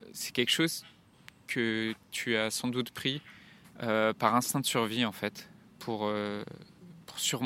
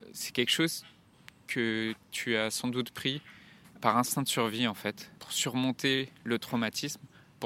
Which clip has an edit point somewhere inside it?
second; 2 cuts; at 3.8 s, 5.2 s

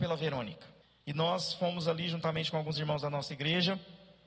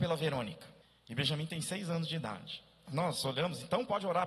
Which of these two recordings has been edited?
first; 1 cut; at 1.0 s

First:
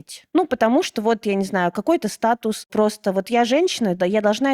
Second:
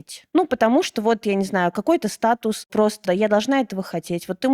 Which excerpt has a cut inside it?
second; 1 cut; at 3.0 s

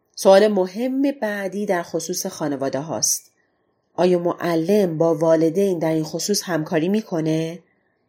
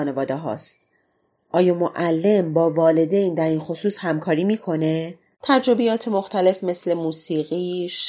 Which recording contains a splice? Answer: second; 1 cut; at 5.3 s

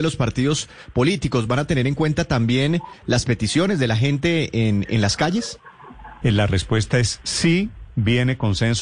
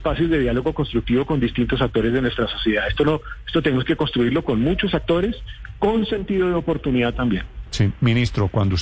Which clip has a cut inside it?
first; 1 cut; at 6.2 s

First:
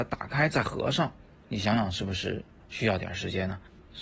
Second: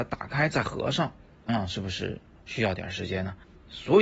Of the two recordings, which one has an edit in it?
second; 1 cut; at 1.5 s

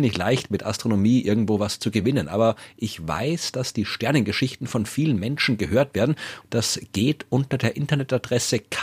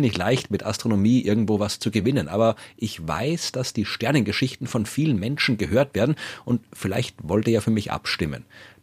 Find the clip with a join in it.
first; 1 cut; at 6.4 s

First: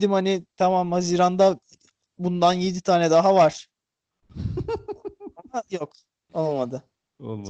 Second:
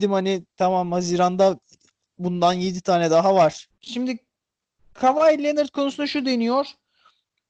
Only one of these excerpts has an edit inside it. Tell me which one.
second; 1 cut; at 3.7 s

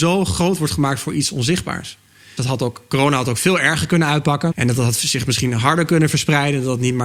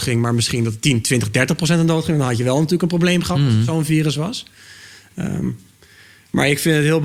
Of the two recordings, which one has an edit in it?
first; 2 cuts; at 2.4 s, 4.5 s

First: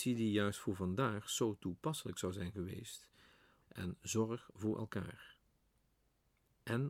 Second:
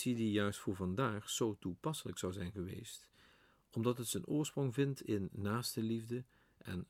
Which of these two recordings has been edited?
first; 1 cut; at 3.6 s

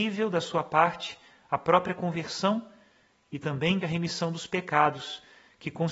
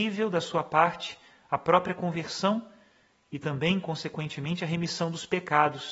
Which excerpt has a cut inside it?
first; 1 cut; at 3.8 s

